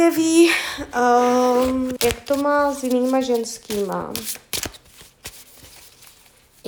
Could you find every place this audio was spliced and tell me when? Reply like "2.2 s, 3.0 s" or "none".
2.0 s

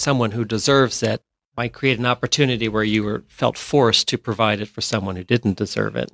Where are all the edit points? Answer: none

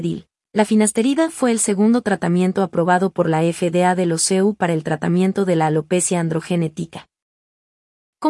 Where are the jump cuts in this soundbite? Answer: none

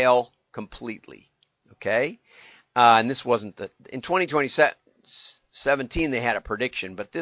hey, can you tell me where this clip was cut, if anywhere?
none

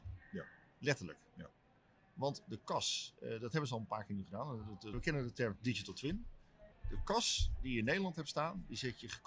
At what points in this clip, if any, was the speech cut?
4.9 s, 6.7 s

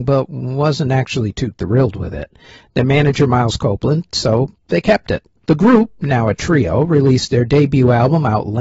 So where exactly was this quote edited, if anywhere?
4.1 s, 5.4 s

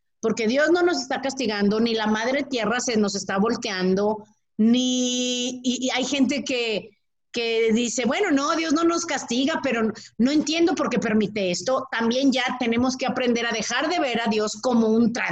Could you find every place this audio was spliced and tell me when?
none

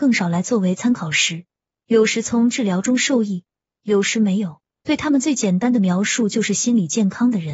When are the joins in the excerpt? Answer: 1.8 s, 4.7 s

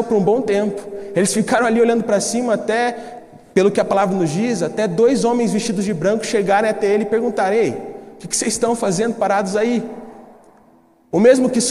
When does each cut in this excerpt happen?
none

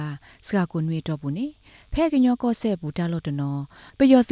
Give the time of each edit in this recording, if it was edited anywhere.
none

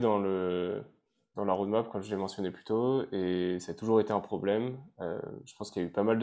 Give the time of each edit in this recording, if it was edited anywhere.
1.3 s

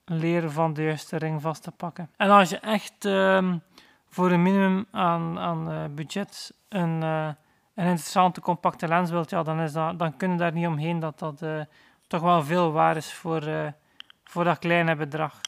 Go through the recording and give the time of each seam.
2.1 s

